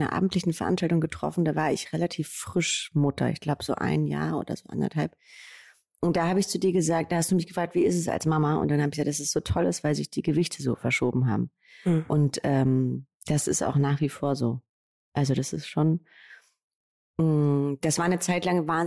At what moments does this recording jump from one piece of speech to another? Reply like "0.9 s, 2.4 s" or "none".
none